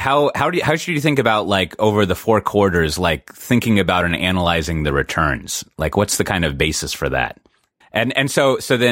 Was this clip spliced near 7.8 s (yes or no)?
yes